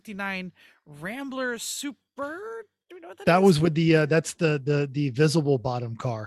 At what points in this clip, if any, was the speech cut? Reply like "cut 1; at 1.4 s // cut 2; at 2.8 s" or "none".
none